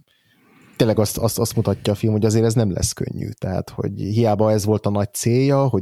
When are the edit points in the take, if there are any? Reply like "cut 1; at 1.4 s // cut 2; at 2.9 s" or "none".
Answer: none